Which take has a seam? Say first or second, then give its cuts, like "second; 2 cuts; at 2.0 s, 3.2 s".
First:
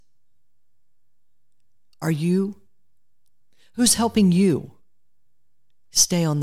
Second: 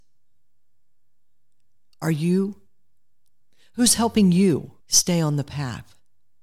second; 1 cut; at 4.8 s